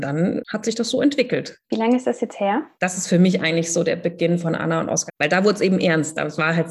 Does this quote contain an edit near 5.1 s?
yes; 3 cuts; at 1.6 s, 2.7 s, 5.1 s

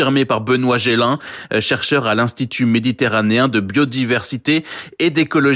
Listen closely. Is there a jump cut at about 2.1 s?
no; 0 cuts

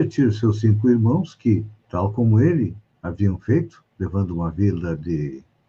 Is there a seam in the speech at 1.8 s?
yes; 2 cuts; at 1.8 s, 3.9 s

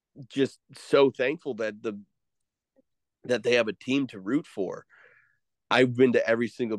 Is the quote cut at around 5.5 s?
yes; 1 cut; at 5.5 s

